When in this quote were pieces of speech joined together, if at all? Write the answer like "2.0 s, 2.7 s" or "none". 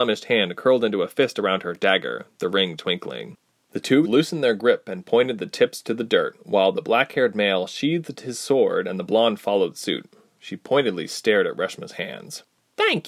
4.0 s